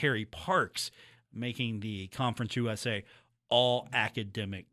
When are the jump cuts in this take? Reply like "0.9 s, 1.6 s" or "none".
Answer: none